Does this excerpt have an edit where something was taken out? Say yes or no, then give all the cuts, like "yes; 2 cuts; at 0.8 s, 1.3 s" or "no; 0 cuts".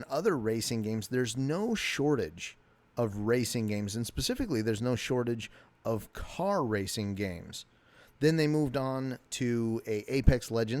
no; 0 cuts